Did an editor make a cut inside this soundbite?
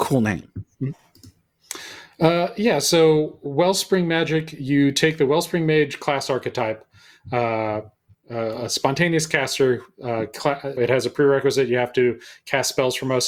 yes; 2 cuts; at 8.1 s, 10.8 s

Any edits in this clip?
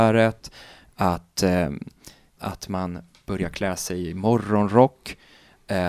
yes; 1 cut; at 2.4 s

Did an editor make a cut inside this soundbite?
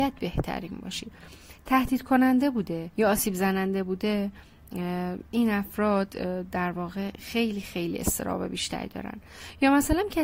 yes; 1 cut; at 2.9 s

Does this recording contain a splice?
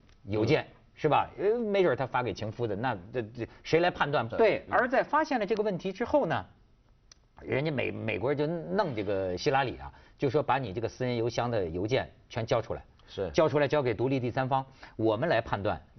yes; 1 cut; at 4.3 s

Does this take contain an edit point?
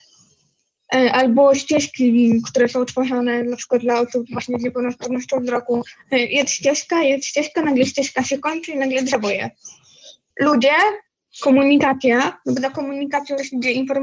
yes; 1 cut; at 10.3 s

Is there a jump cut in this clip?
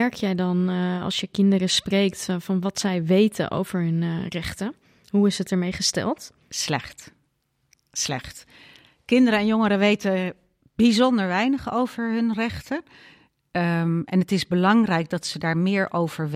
no; 0 cuts

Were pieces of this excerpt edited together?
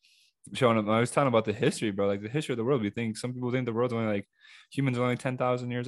no; 0 cuts

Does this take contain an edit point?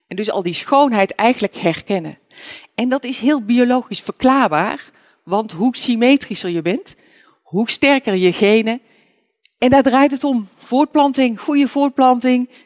no; 0 cuts

